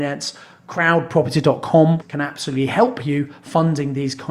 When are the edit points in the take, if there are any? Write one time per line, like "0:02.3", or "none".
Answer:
0:02.0